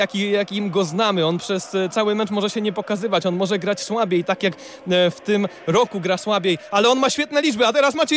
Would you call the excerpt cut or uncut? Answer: uncut